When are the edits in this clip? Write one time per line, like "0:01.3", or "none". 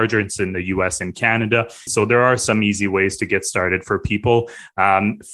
0:01.9